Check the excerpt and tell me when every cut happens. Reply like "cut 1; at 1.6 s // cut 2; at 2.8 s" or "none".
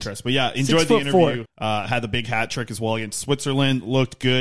cut 1; at 1.4 s